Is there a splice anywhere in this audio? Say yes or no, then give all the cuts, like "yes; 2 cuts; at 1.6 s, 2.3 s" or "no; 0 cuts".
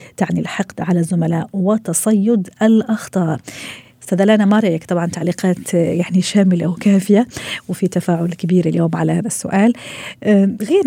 no; 0 cuts